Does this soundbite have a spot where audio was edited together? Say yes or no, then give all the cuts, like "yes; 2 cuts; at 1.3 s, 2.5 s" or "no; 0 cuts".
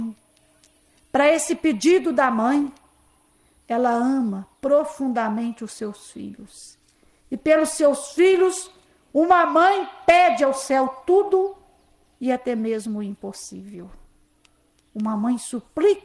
yes; 1 cut; at 3.6 s